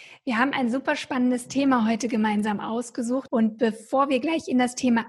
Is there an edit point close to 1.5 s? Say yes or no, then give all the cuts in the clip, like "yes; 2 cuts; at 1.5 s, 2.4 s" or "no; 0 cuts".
no; 1 cut; at 3.3 s